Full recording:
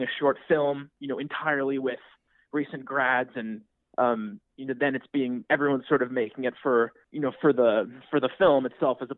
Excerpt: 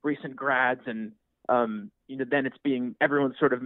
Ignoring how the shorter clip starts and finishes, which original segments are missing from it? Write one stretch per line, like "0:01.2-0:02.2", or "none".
none